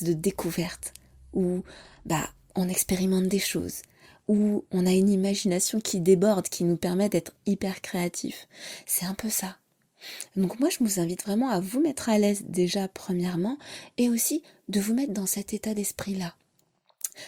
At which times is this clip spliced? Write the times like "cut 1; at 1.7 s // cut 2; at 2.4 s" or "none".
none